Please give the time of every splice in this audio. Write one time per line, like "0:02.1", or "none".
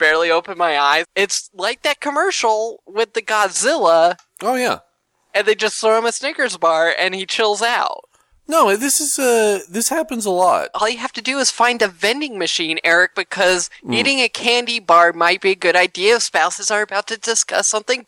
0:01.0
0:10.7

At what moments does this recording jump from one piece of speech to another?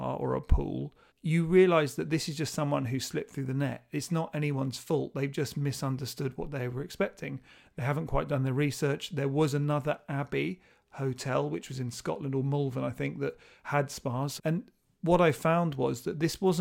0:01.1
0:14.4

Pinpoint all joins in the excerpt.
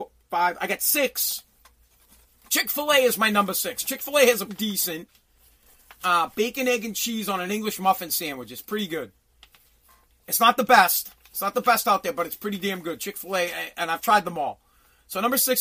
0:04.5

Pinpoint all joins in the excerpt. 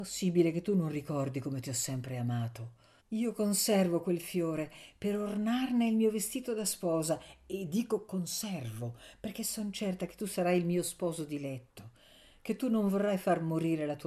0:03.0

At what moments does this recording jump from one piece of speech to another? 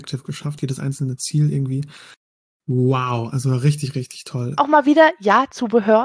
0:04.6

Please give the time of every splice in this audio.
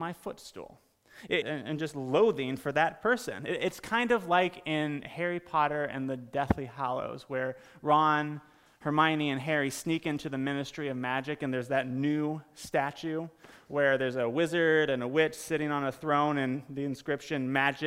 0:01.4

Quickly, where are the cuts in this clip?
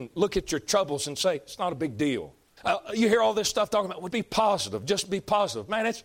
0:02.6
0:04.1

